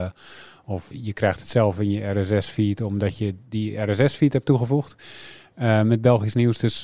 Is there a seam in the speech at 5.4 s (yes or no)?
no